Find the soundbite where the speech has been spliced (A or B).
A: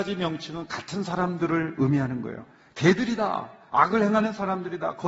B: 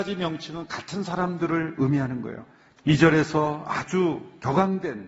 B